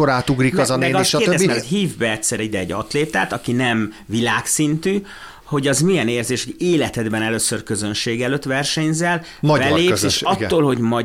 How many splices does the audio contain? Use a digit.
1